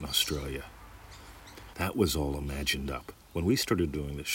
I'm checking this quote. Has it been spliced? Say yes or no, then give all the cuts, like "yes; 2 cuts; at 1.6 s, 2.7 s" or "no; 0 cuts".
yes; 2 cuts; at 1.7 s, 3.2 s